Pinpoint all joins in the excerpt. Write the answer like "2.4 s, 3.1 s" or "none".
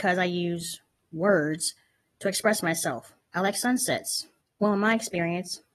3.2 s, 4.4 s